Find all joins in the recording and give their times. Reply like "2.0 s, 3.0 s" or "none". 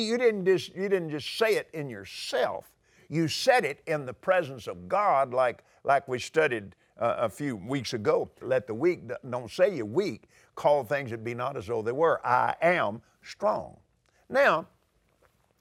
8.4 s